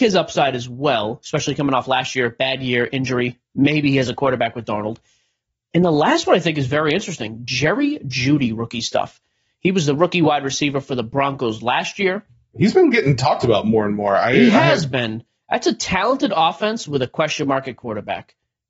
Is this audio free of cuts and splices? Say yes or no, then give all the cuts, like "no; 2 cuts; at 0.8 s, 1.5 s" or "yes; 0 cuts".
yes; 0 cuts